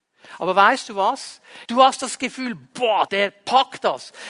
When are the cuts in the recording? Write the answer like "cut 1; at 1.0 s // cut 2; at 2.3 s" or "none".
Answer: cut 1; at 1.6 s // cut 2; at 3.1 s

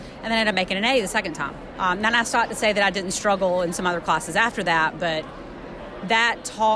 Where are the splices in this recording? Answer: cut 1; at 1.7 s

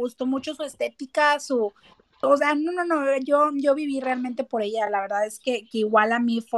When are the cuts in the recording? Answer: none

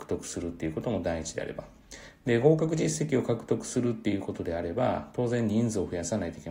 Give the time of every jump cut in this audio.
none

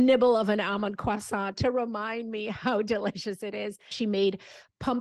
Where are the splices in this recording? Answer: cut 1; at 3.9 s

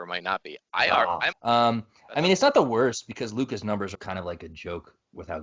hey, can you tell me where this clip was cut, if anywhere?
cut 1; at 1.3 s // cut 2; at 3.9 s

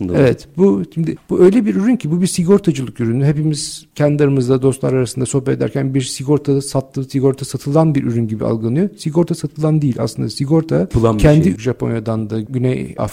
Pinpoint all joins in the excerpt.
cut 1; at 11.6 s

